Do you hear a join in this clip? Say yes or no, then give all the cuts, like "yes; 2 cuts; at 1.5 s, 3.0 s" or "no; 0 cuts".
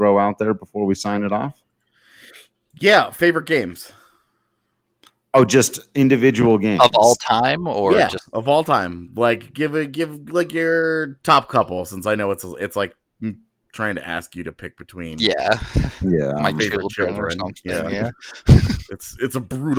no; 0 cuts